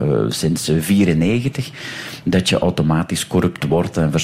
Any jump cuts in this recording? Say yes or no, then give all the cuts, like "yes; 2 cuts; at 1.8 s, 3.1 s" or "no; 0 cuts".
yes; 1 cut; at 2.2 s